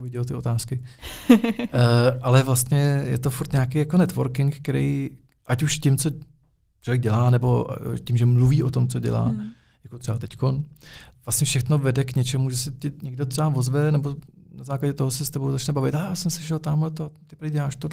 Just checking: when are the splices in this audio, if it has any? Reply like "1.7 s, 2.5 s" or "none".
11.2 s